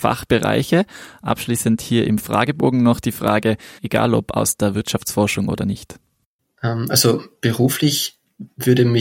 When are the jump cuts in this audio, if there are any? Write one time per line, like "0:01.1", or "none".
0:03.8

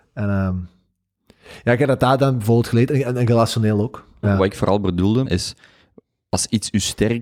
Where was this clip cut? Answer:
0:04.2
0:05.2

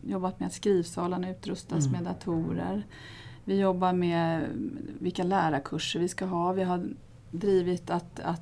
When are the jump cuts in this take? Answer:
none

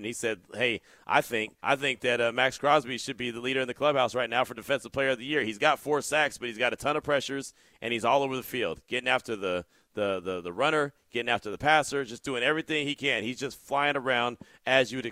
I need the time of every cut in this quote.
0:01.6

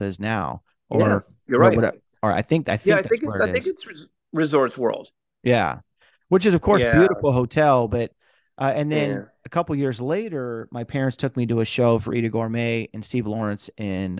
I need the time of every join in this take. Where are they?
none

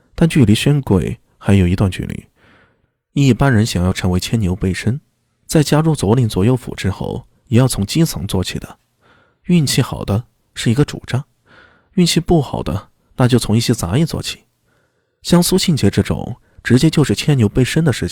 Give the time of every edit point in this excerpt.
none

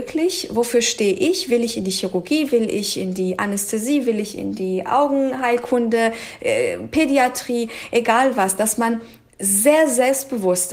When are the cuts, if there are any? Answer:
none

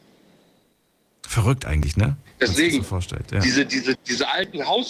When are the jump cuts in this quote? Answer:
0:03.9

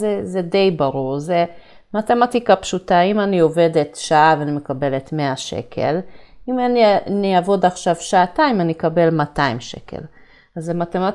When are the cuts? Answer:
none

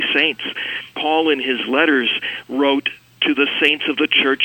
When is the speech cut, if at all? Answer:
0:00.9

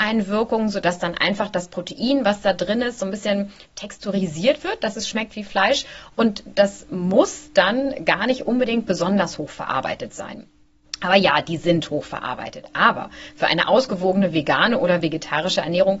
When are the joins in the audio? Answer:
none

